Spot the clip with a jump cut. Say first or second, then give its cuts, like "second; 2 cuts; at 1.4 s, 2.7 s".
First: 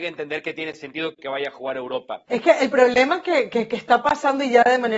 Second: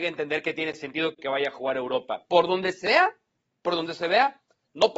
first; 1 cut; at 2.3 s